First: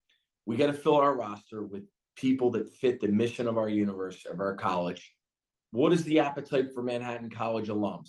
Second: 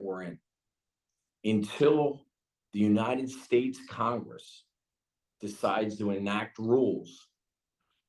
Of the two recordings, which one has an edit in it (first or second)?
first